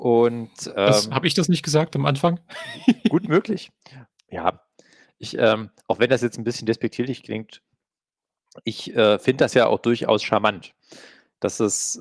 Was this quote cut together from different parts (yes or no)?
yes